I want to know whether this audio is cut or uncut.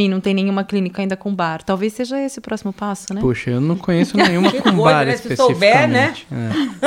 uncut